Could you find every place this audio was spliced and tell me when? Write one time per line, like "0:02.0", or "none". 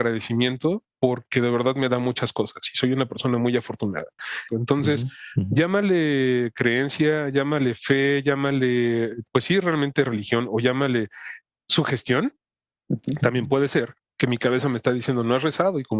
0:04.5